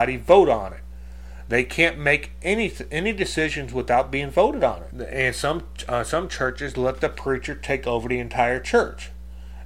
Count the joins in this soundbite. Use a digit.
1